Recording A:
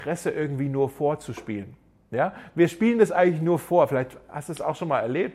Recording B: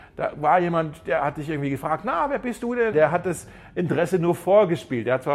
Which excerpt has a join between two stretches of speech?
B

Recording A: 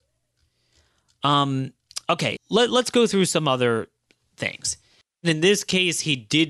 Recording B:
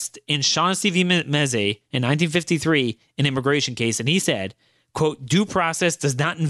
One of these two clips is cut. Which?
A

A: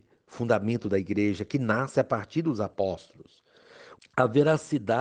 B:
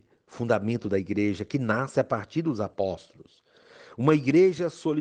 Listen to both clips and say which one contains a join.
A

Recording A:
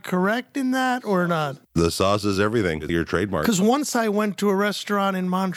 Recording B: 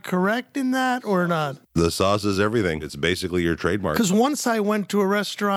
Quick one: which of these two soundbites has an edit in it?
A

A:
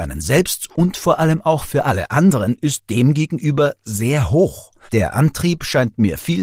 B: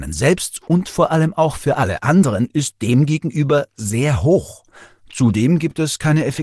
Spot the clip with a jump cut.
A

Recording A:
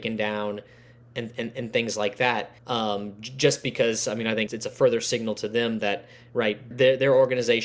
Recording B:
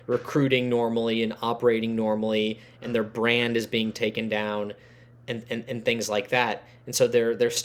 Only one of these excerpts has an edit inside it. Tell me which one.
A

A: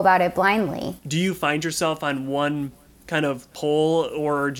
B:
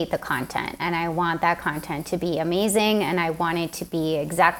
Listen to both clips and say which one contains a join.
A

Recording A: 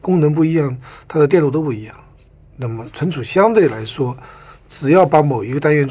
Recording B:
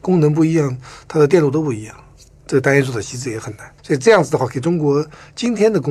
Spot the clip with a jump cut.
B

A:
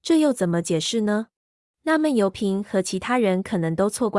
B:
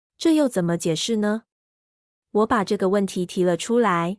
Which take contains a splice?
A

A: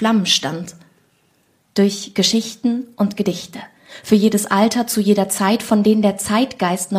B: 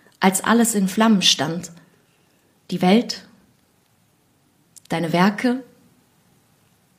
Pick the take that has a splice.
A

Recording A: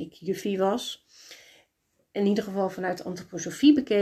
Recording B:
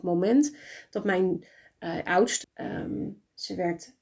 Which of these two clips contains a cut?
B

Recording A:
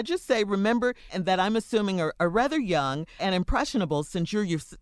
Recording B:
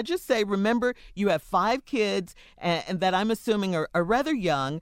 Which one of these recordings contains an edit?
A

